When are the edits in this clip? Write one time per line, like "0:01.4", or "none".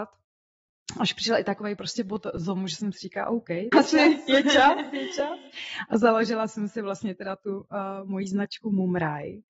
0:03.7